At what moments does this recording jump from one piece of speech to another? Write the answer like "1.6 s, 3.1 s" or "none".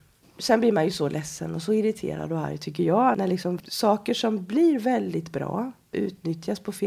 none

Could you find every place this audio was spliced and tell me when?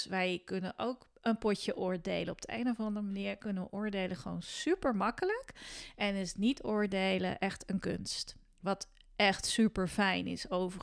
none

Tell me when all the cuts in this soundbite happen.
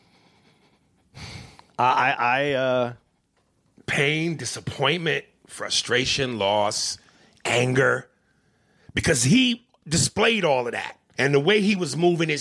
11.1 s

